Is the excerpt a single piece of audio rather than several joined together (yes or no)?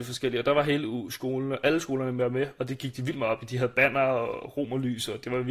yes